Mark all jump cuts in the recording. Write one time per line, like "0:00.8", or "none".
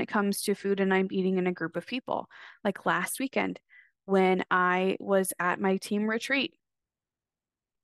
none